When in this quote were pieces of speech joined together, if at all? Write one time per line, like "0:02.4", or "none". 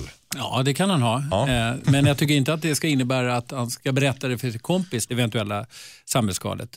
0:01.8
0:05.1